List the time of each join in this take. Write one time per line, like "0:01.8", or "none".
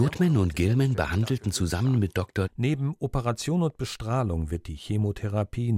0:02.4